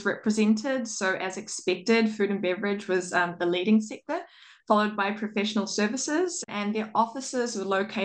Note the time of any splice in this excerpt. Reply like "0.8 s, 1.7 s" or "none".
6.4 s